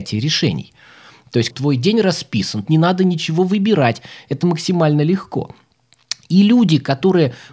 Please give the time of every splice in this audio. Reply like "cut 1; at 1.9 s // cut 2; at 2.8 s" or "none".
cut 1; at 1.5 s // cut 2; at 2.7 s